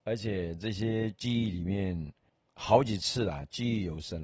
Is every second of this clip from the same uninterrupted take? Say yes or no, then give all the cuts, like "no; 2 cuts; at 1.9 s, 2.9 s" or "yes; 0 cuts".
yes; 0 cuts